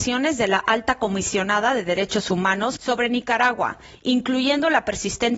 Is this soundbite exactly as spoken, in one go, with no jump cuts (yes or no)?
no